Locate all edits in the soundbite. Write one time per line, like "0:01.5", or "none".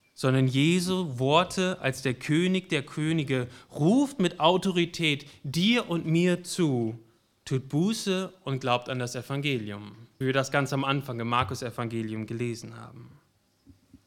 0:10.2